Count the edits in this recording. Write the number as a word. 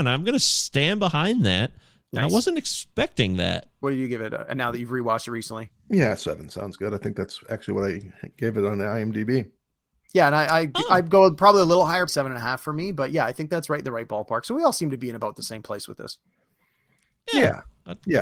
two